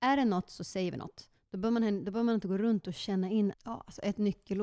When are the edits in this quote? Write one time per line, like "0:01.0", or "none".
0:03.5